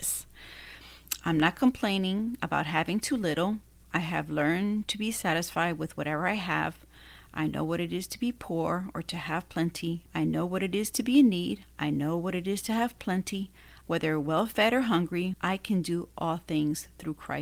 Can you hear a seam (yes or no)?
yes